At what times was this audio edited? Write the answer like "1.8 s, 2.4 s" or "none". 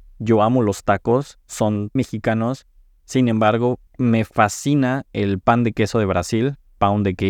2.0 s, 3.9 s